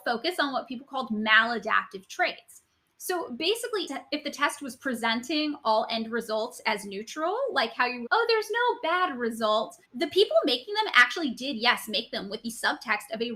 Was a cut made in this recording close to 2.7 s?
no; 3 cuts; at 3.9 s, 8.1 s, 9.8 s

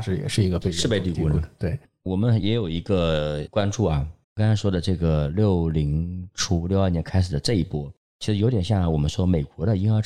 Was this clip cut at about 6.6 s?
no; 1 cut; at 4.2 s

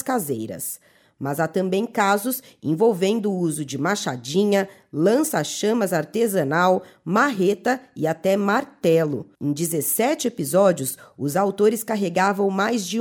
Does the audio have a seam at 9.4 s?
yes; 1 cut; at 9.4 s

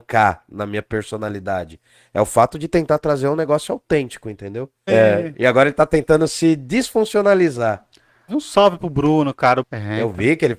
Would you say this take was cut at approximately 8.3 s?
yes; 3 cuts; at 4.9 s, 8.3 s, 9.6 s

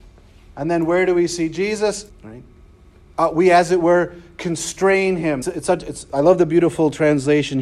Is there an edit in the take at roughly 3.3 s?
no; 2 cuts; at 2.1 s, 5.4 s

